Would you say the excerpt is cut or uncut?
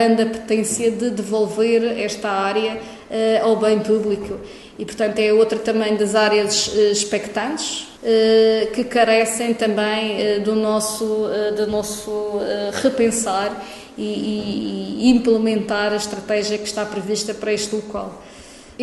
cut